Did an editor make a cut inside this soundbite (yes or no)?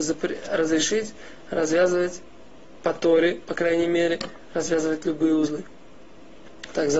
no